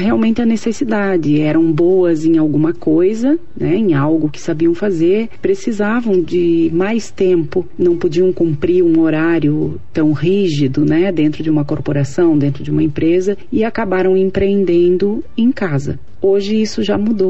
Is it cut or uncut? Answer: uncut